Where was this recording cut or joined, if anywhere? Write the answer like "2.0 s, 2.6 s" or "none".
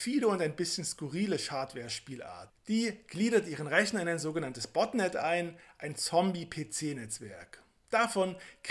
none